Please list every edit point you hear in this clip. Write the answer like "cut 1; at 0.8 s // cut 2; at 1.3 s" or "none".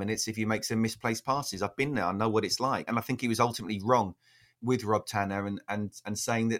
cut 1; at 2.9 s